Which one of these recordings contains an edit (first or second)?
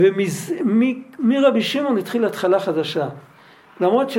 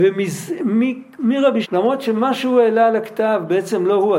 second